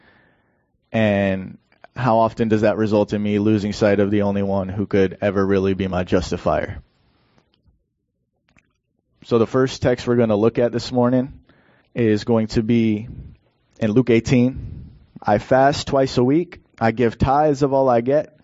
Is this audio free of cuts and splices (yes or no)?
no